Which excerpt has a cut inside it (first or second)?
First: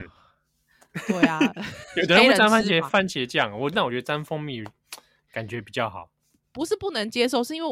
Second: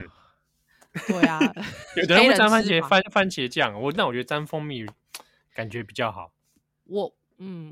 first